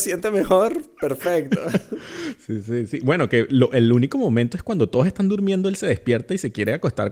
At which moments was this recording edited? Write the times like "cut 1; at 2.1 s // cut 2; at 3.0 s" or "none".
none